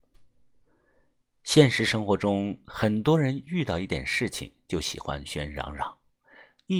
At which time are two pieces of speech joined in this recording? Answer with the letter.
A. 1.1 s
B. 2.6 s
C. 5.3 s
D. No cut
C